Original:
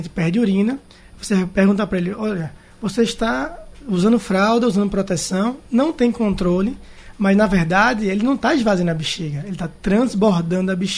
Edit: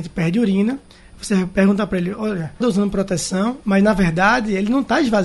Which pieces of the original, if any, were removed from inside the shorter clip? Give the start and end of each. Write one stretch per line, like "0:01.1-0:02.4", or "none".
0:02.6-0:04.6
0:05.6-0:07.2